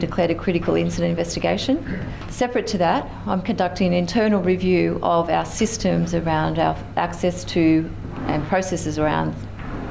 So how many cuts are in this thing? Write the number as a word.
one